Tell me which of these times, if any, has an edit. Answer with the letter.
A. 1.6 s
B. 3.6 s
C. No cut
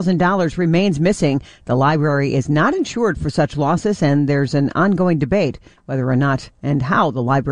C